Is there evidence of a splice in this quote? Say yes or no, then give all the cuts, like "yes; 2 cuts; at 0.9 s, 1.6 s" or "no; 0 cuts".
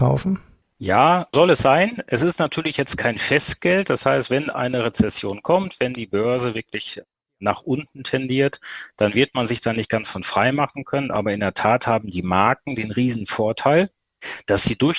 yes; 1 cut; at 1.3 s